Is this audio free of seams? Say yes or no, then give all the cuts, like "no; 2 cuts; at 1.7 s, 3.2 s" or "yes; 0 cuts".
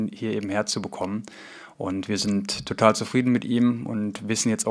yes; 0 cuts